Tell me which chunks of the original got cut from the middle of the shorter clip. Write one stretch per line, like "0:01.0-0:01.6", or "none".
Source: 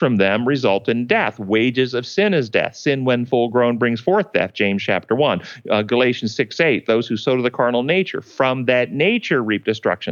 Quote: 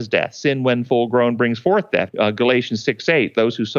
0:04.5-0:05.6